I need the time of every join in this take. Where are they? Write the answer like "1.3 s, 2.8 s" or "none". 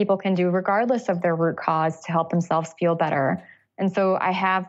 none